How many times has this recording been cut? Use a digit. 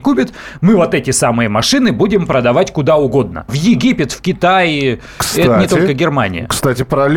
1